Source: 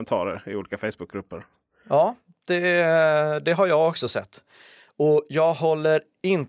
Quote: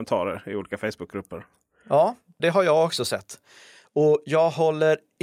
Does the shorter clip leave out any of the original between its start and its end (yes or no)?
yes